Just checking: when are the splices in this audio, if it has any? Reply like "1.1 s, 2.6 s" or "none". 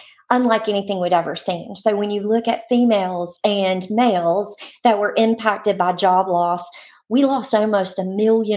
none